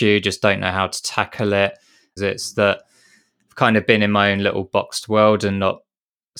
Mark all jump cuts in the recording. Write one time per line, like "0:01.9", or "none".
0:02.2